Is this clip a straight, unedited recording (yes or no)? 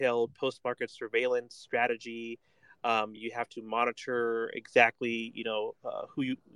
yes